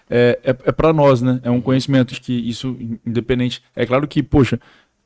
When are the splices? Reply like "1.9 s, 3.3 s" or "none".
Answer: 2.1 s